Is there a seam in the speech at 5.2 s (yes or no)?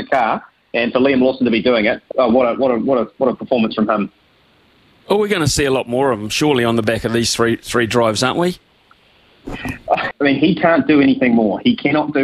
no